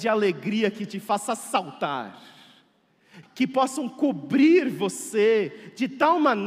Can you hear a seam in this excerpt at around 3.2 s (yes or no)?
yes